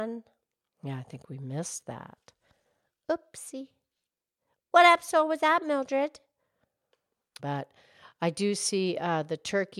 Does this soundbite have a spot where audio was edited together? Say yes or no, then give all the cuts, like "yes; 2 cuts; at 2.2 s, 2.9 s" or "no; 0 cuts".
yes; 1 cut; at 7.4 s